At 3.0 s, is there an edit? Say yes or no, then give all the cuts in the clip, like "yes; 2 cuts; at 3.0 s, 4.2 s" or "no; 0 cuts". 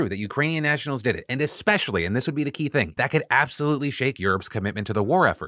yes; 1 cut; at 3.0 s